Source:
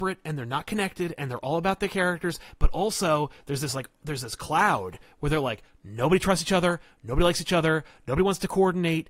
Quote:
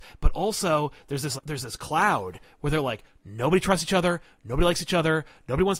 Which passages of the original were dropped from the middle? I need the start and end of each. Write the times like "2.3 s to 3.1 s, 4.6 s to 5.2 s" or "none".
3.7 s to 3.9 s